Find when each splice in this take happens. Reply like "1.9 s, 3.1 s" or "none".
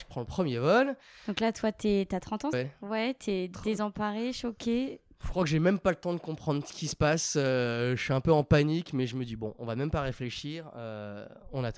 2.5 s